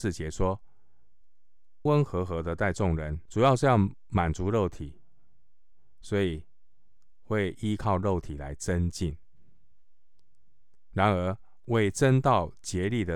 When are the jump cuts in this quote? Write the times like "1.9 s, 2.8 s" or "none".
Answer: 1.9 s, 3.3 s